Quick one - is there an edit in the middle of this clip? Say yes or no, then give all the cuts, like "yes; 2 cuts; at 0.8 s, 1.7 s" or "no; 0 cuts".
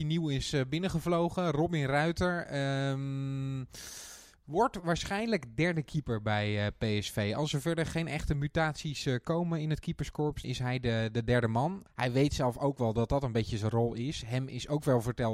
yes; 2 cuts; at 10.4 s, 11.9 s